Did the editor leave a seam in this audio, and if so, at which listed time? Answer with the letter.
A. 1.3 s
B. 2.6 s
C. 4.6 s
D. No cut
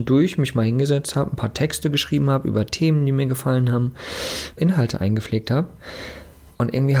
C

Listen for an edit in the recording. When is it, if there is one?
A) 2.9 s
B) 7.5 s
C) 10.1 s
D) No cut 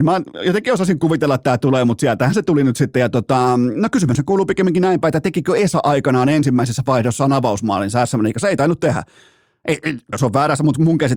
C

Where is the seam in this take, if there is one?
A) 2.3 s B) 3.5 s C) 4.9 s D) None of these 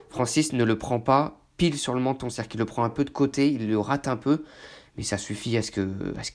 D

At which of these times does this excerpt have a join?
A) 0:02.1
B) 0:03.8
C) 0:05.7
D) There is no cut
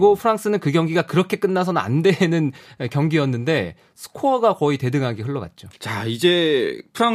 C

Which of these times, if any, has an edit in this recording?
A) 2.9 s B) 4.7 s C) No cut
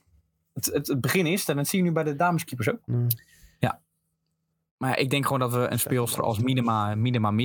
A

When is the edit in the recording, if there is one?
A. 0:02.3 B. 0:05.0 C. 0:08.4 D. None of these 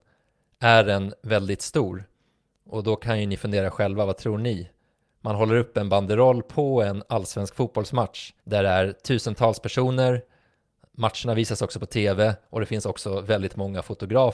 C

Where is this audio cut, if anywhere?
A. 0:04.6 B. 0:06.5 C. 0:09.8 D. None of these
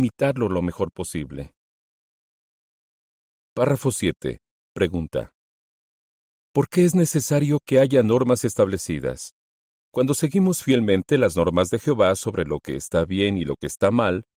C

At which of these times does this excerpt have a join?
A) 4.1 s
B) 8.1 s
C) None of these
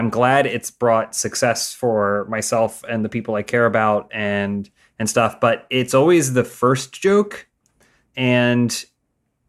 C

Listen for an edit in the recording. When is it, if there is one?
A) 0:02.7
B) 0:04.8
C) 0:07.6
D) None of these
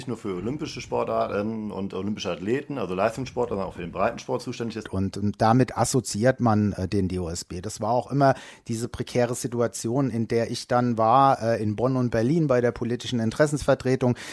B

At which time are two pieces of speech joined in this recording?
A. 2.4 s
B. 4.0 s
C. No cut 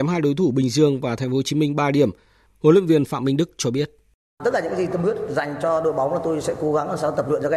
A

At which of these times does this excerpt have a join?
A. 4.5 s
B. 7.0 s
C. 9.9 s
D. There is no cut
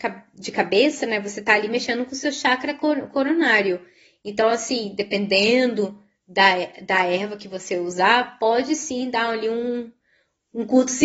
D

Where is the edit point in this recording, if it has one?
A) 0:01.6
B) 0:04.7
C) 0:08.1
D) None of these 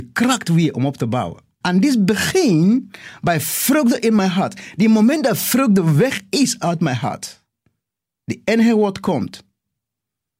A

